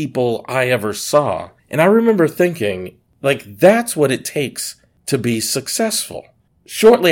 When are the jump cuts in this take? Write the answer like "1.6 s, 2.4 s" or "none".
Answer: 1.6 s